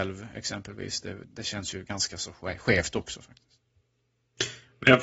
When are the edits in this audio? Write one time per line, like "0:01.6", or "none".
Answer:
0:01.3